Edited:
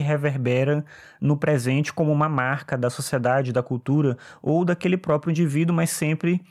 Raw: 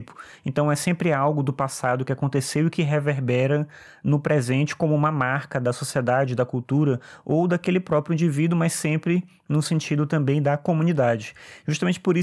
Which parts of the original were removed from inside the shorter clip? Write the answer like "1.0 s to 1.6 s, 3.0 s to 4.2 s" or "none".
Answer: none